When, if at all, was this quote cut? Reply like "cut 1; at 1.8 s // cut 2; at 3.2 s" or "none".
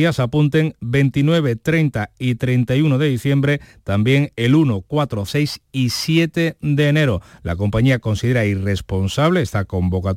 cut 1; at 5.3 s